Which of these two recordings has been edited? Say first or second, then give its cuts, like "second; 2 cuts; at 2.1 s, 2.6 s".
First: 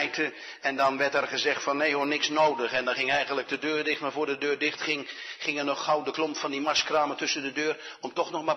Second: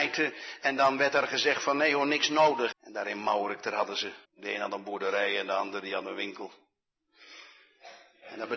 second; 2 cuts; at 2.7 s, 4.2 s